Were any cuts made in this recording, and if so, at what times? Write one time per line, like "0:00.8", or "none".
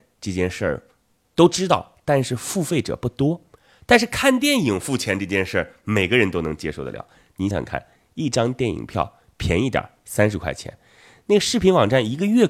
0:07.5